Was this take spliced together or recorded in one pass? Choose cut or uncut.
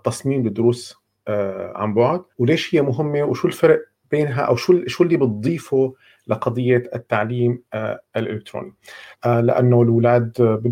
cut